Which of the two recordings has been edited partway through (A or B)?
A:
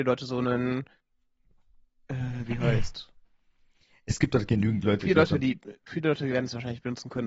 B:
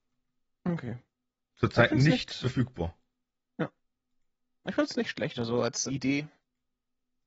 B